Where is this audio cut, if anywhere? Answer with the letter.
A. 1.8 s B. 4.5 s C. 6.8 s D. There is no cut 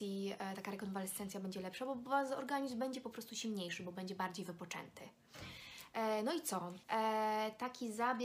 C